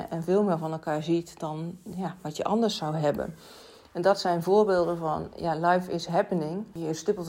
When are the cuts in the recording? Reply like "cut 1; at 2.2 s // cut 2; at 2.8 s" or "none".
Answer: none

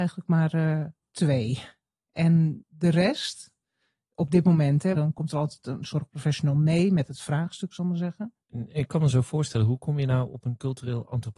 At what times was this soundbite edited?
cut 1; at 4.9 s // cut 2; at 8.4 s

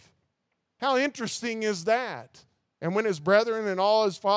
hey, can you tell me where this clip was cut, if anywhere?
cut 1; at 2.8 s

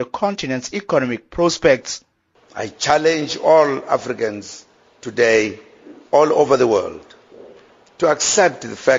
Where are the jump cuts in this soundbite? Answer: cut 1; at 7.9 s

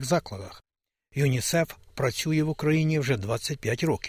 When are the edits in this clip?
none

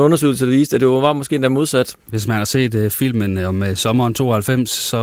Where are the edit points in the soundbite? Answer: cut 1; at 2.0 s

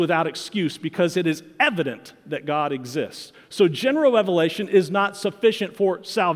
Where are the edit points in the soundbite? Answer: none

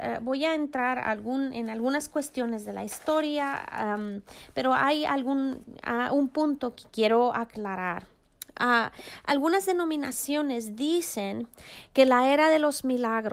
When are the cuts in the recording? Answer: none

